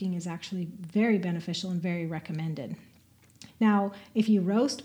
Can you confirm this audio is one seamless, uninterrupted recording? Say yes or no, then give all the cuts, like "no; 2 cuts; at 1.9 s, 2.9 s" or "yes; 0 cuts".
no; 1 cut; at 3.5 s